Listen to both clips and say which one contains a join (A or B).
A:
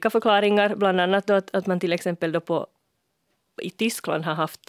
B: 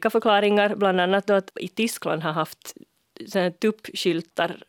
B